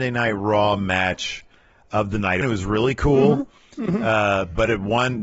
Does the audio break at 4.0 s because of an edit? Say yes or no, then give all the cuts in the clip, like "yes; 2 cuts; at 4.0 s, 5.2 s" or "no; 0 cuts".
no; 1 cut; at 2.4 s